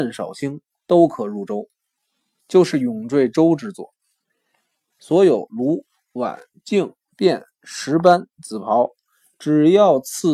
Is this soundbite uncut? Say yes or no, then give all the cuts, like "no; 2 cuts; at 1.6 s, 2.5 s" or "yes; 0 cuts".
no; 2 cuts; at 2.4 s, 4.9 s